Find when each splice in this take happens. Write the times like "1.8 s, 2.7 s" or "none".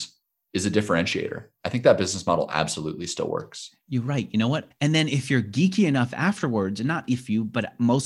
4.7 s

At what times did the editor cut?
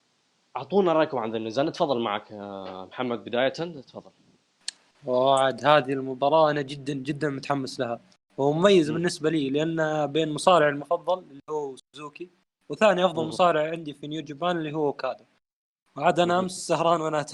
none

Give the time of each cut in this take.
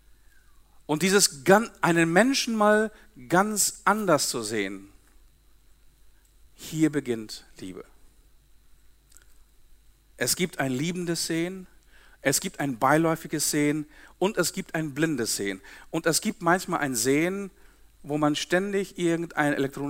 none

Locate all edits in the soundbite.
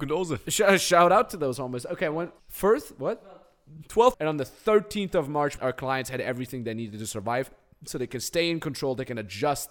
2.4 s, 4.1 s, 5.6 s

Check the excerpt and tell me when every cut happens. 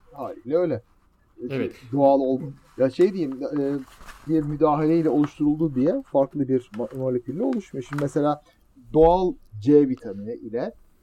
4.3 s

